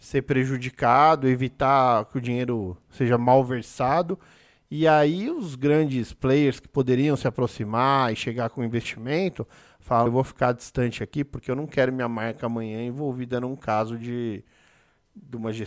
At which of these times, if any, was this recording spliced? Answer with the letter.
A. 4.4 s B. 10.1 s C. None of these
B